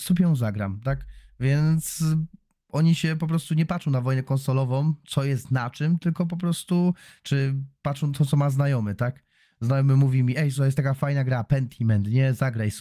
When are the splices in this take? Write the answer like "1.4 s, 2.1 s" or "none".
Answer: none

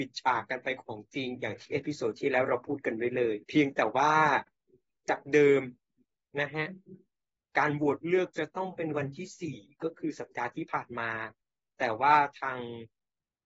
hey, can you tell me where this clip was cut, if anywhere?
3.4 s

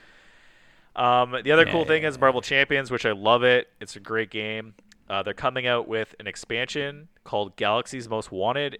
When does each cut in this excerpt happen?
none

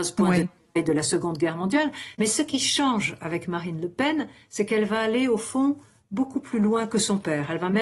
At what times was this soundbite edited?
2.1 s

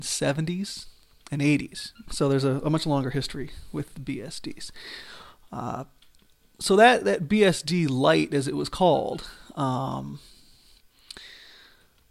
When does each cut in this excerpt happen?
2.0 s

